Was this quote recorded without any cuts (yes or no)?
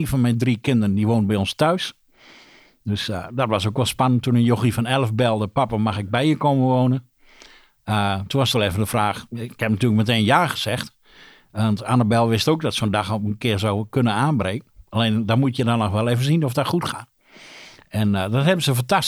yes